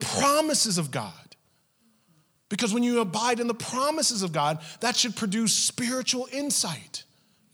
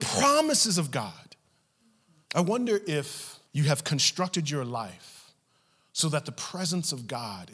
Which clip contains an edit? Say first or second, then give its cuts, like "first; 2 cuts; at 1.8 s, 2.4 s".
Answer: second; 2 cuts; at 2.2 s, 3.5 s